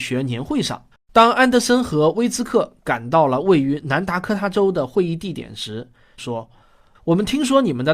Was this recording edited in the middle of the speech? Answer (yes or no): yes